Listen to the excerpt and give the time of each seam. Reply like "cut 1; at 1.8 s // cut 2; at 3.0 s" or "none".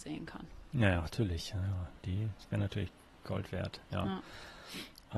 none